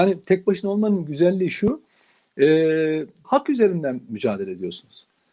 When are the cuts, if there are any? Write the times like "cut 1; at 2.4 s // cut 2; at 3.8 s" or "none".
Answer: cut 1; at 3.2 s